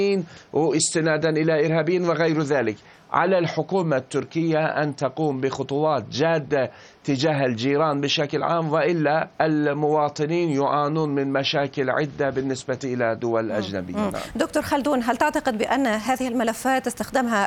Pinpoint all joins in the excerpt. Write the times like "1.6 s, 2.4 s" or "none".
9.3 s

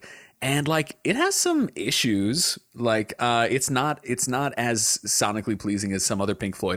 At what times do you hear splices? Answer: none

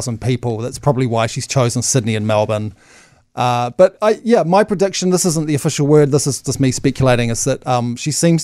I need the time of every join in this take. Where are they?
none

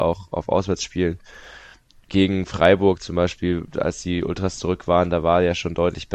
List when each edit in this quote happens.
none

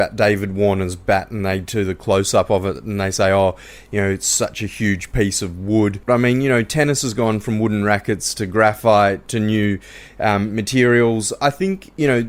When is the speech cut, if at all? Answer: 6.1 s, 9.3 s

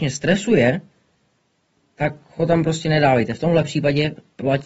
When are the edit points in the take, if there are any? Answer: none

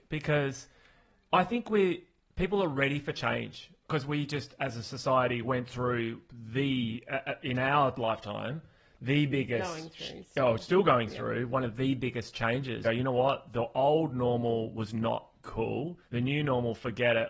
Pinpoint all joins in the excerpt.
12.8 s, 16.1 s

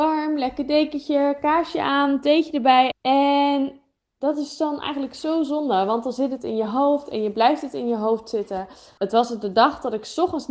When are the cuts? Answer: 2.9 s, 9.0 s

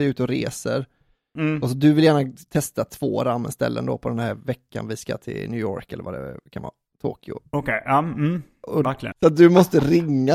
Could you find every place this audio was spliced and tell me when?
9.1 s

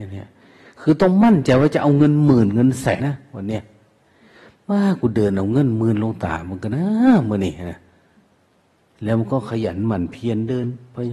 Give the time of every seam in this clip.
3.0 s

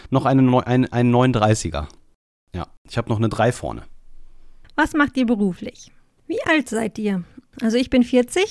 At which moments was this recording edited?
6.2 s

